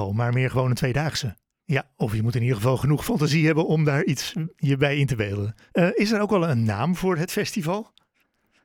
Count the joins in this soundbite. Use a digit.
2